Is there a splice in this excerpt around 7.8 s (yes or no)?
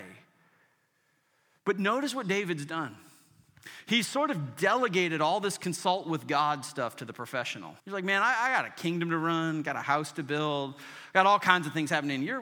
yes